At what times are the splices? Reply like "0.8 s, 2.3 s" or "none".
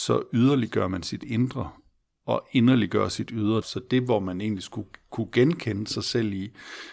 3.6 s

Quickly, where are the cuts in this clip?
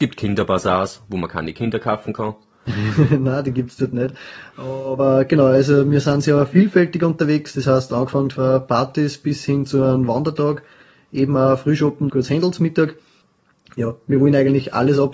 12.1 s

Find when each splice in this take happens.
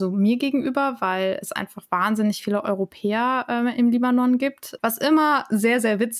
4.8 s

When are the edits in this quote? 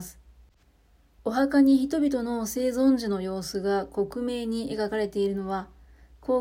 1.2 s

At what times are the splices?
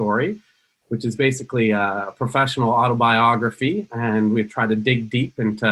none

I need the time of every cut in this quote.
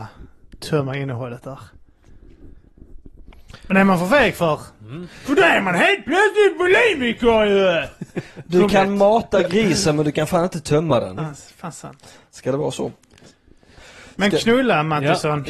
8.7 s, 11.2 s

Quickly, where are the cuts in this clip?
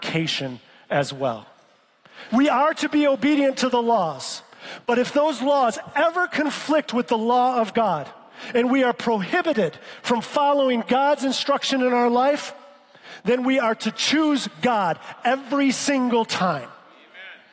2.3 s

